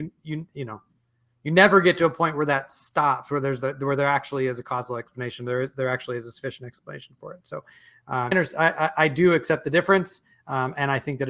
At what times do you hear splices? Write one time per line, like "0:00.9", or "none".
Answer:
0:08.3